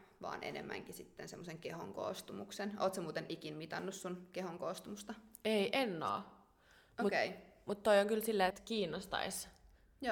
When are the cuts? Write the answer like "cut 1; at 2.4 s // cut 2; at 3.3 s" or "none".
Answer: cut 1; at 8.5 s